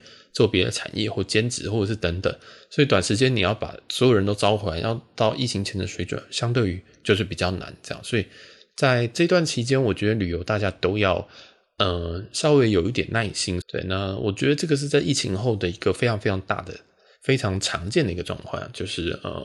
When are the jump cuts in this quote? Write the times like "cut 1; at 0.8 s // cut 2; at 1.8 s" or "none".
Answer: cut 1; at 13.6 s